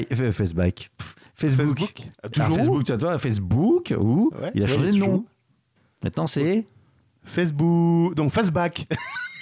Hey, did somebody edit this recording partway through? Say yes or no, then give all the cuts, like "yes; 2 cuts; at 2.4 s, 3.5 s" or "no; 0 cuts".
yes; 1 cut; at 2.1 s